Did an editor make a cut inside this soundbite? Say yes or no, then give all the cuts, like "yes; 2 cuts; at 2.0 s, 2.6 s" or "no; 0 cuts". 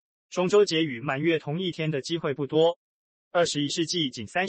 no; 0 cuts